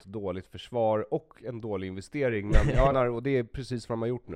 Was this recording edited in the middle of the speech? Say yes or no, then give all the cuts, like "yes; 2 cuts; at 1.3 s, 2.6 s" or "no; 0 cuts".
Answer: yes; 1 cut; at 2.9 s